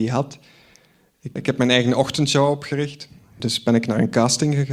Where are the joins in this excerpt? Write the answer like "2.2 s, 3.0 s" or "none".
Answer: 1.4 s, 3.4 s